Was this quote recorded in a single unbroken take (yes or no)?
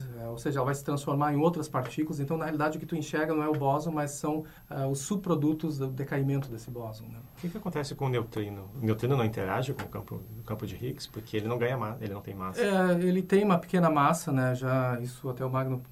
yes